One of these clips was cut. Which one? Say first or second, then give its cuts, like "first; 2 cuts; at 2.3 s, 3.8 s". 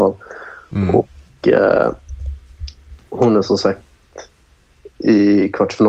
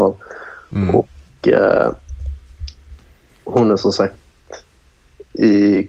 first; 1 cut; at 3.0 s